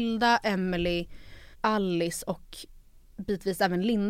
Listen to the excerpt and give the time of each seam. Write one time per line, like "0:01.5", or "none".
0:01.5